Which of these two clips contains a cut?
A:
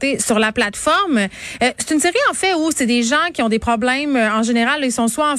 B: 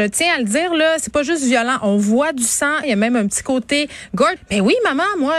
B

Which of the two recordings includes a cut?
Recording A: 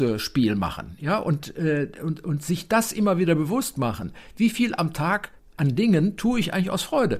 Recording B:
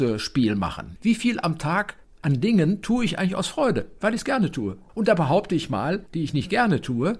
B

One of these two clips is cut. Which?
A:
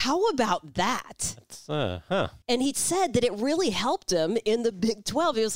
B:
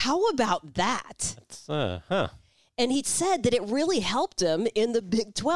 A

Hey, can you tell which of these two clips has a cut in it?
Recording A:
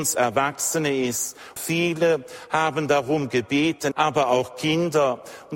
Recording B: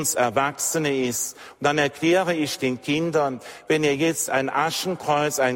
A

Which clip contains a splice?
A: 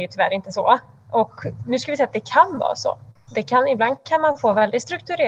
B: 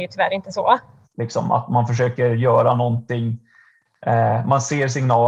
B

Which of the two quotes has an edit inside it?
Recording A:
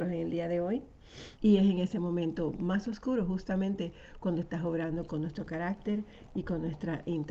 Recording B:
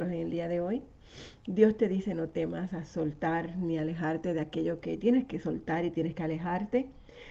A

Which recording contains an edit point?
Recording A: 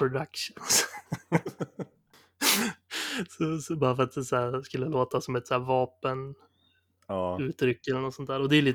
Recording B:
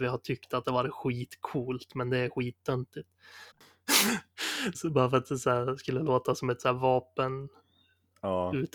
B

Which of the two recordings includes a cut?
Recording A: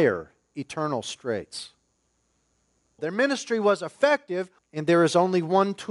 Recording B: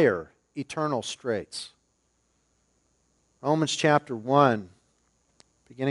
A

